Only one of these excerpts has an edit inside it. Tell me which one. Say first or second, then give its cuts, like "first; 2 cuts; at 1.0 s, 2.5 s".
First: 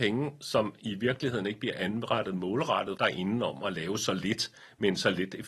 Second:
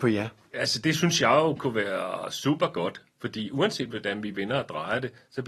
first; 1 cut; at 3.0 s